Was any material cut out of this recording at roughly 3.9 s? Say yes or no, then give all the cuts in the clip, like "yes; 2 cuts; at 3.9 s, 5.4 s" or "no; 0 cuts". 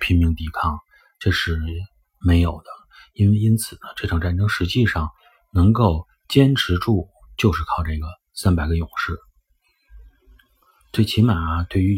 no; 1 cut; at 7.3 s